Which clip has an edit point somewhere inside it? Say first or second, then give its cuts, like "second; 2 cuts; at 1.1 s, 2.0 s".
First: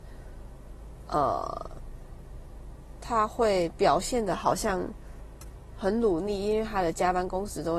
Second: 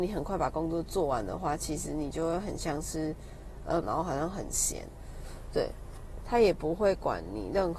second; 2 cuts; at 3.8 s, 6.2 s